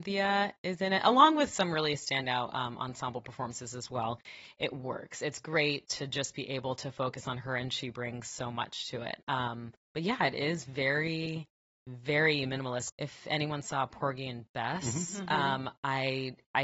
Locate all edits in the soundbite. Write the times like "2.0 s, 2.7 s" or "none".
12.9 s